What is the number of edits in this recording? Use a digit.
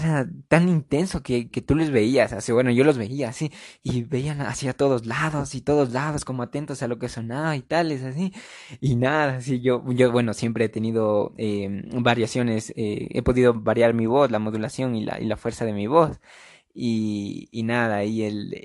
1